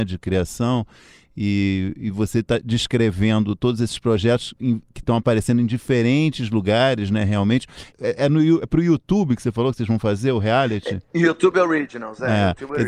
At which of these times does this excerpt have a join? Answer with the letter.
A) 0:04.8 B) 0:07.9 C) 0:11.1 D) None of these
B